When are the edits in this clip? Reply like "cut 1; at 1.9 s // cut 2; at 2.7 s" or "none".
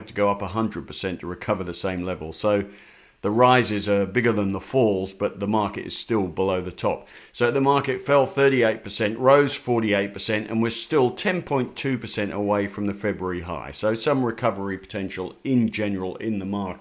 none

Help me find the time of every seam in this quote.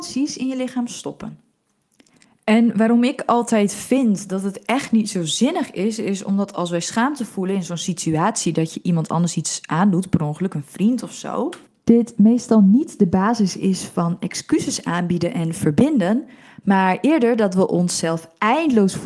none

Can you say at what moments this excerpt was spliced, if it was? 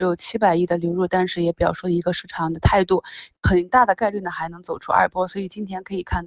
cut 1; at 3.3 s

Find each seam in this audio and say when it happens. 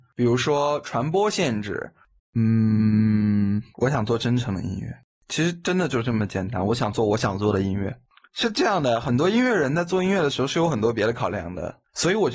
cut 1; at 2.2 s

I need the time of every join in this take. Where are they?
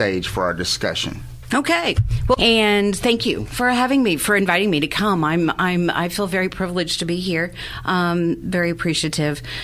cut 1; at 2.4 s

